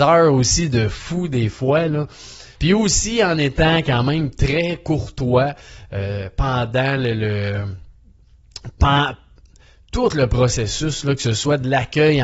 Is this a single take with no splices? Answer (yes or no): no